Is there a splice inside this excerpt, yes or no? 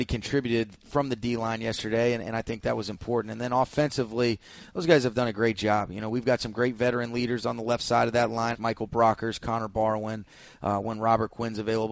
yes